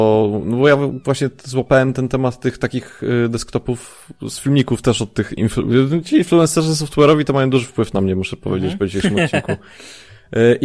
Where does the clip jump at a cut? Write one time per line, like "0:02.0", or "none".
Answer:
none

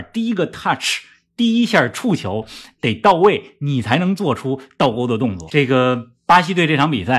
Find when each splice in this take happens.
0:05.5

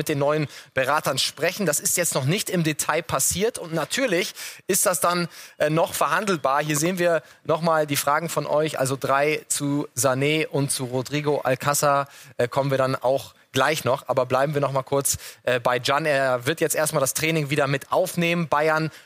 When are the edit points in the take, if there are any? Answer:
none

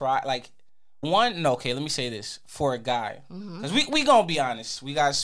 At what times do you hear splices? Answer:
0:01.0

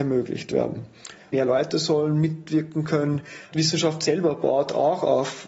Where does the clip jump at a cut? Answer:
0:01.3
0:03.5

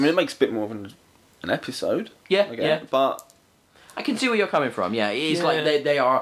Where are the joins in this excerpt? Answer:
none

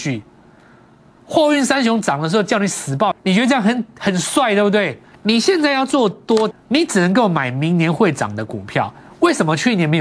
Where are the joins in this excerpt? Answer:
0:03.1
0:05.1
0:06.5

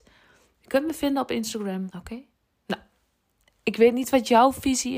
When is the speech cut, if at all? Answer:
0:01.9

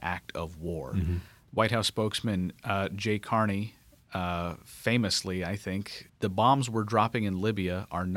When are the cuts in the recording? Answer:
0:01.5
0:06.1

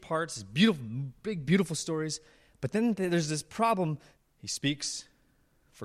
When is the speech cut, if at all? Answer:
0:04.2

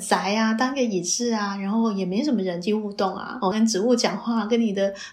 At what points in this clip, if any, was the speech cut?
0:03.5

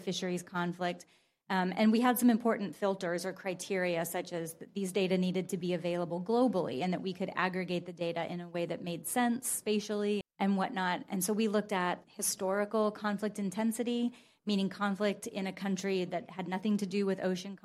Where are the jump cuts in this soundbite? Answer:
0:10.2

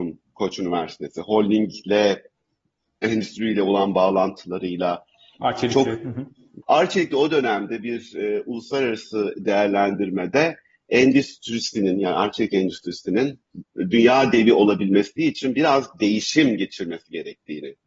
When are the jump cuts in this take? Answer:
0:06.6

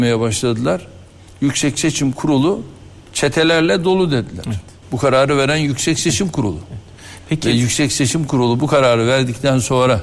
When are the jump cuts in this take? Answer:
0:04.8

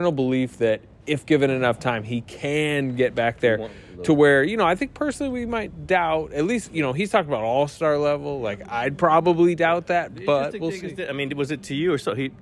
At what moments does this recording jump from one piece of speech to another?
none

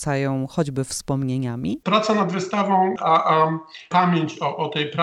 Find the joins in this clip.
0:01.8
0:03.0

